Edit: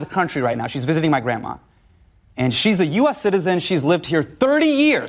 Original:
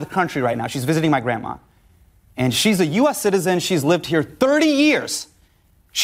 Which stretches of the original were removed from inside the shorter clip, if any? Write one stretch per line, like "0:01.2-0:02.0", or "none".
none